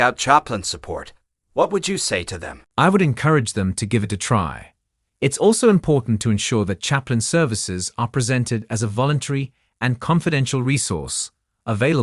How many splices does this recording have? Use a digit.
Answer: 1